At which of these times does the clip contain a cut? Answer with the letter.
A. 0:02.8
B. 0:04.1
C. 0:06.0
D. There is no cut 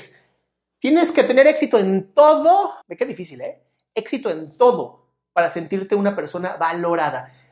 A